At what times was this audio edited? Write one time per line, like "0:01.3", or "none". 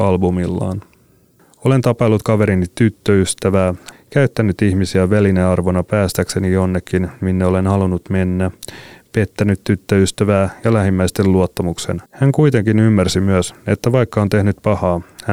0:03.9
0:12.1